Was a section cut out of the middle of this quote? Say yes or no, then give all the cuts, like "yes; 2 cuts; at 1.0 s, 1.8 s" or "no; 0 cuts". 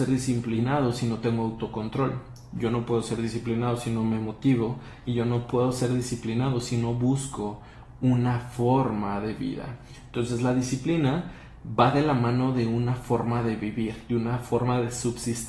no; 0 cuts